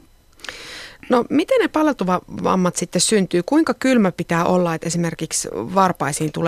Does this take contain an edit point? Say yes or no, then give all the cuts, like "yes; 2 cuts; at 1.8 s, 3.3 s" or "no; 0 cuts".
no; 0 cuts